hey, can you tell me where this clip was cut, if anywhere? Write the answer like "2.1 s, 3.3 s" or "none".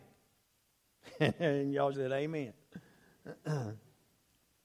1.9 s